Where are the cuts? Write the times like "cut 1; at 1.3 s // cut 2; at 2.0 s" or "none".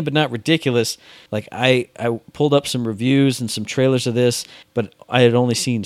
cut 1; at 1.3 s // cut 2; at 4.6 s

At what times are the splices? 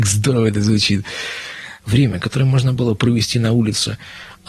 cut 1; at 1.8 s

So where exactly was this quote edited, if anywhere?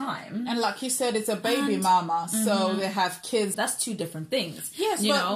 cut 1; at 3.5 s

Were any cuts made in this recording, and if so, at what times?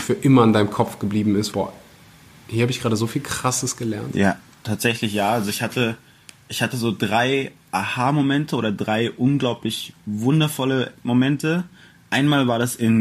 cut 1; at 1.5 s

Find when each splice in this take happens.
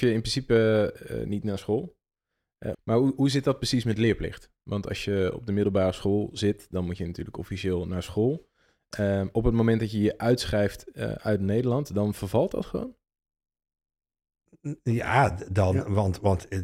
cut 1; at 2.7 s

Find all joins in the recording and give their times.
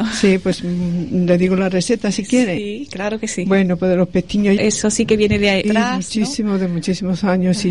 cut 1; at 4.6 s // cut 2; at 5.6 s

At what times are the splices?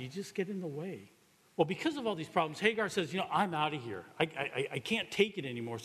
cut 1; at 1.4 s

